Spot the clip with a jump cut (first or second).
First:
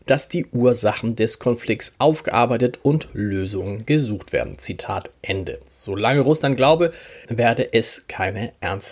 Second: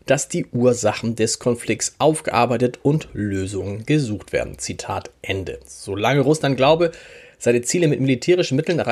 first